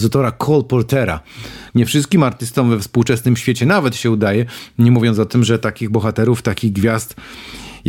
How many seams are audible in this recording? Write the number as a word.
one